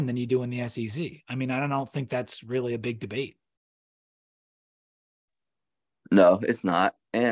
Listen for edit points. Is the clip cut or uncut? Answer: uncut